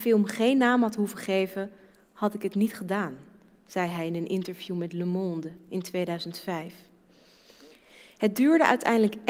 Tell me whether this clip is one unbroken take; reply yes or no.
yes